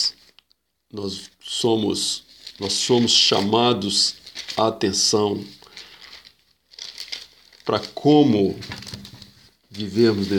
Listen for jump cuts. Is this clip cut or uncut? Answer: uncut